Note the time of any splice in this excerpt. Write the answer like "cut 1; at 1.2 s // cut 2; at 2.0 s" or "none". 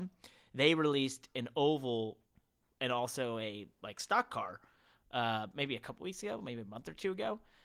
none